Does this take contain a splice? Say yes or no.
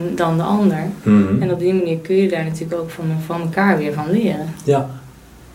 no